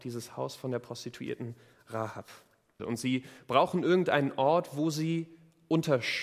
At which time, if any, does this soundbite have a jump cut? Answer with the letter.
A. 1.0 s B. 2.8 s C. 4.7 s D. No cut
B